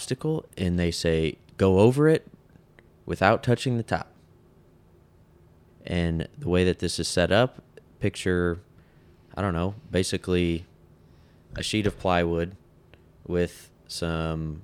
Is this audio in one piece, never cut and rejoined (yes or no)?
no